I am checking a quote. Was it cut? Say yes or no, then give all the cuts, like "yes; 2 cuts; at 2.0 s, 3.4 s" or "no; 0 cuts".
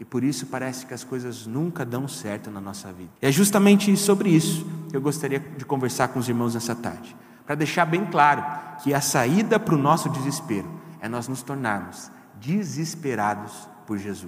yes; 1 cut; at 3.2 s